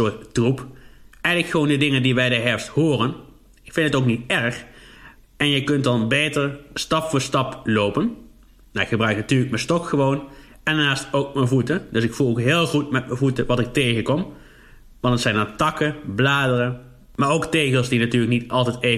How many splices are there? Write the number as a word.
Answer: one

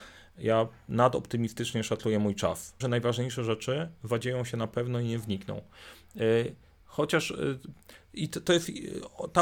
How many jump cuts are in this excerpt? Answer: one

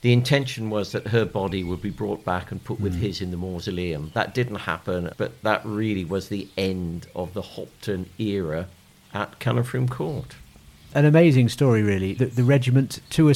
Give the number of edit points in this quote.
three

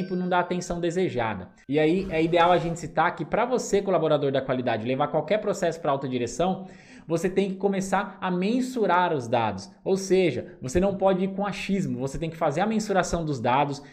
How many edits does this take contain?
zero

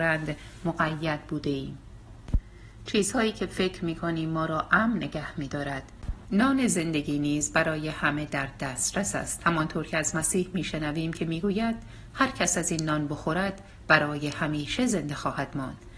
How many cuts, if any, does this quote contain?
one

